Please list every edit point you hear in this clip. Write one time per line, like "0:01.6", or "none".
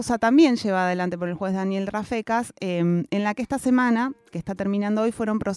0:04.3